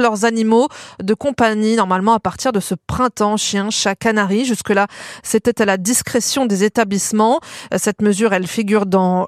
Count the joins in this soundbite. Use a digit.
0